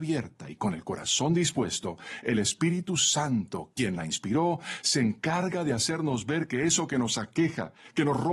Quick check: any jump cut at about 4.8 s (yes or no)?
no